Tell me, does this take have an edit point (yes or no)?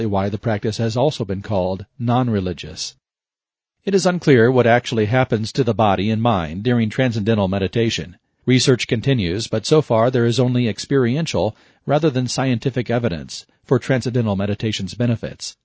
no